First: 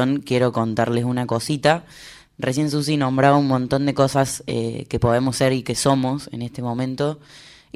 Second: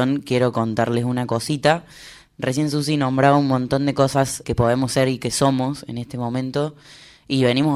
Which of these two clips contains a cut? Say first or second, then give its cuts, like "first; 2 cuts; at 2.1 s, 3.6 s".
second; 1 cut; at 4.4 s